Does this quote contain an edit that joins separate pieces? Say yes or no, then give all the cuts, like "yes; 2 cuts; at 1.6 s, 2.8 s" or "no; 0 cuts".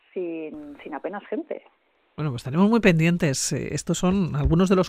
no; 0 cuts